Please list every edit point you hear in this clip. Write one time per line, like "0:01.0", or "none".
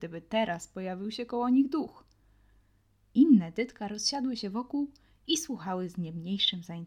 none